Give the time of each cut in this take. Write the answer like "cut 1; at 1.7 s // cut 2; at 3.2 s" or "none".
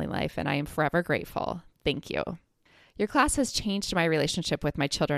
cut 1; at 2.8 s